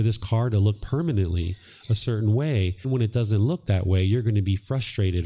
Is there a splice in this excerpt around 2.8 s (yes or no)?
yes